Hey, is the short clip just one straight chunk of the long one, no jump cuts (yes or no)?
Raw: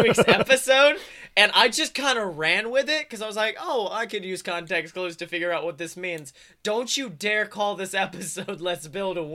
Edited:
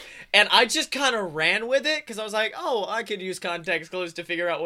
yes